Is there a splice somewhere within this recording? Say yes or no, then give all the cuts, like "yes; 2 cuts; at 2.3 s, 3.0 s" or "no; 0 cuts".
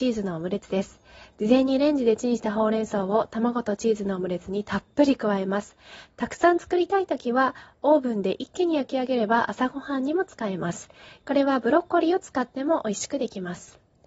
no; 0 cuts